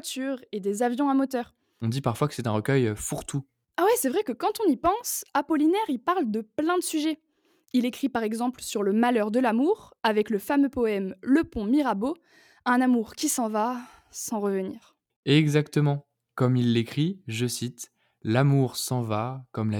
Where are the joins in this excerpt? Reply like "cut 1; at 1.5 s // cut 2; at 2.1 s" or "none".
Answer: cut 1; at 1.8 s